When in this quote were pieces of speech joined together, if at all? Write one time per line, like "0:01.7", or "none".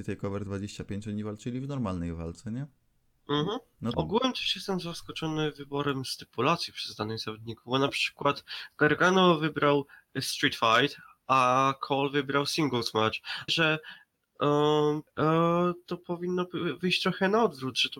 0:03.9
0:13.5
0:15.1